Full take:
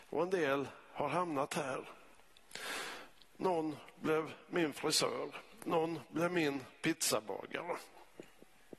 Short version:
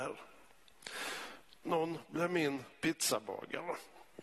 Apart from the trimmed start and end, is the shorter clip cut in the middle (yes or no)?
yes